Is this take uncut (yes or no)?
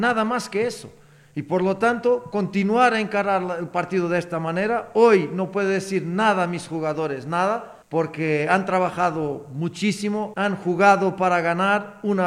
no